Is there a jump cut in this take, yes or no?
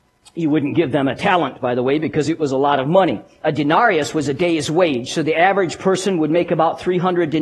no